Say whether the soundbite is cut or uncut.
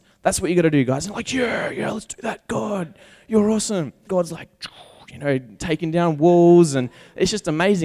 cut